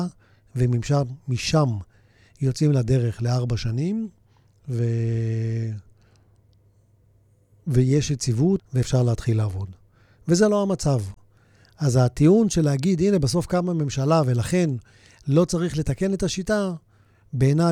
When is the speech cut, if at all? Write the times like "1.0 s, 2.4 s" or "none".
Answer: 8.6 s